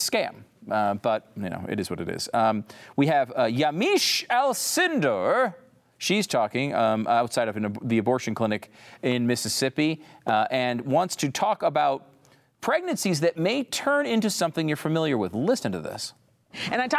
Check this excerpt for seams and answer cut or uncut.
uncut